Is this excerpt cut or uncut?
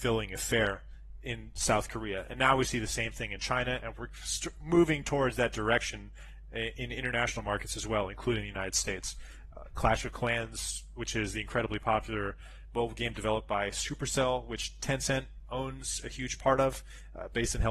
uncut